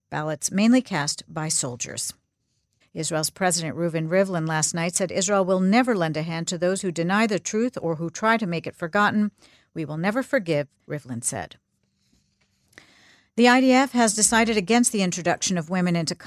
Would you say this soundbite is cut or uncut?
cut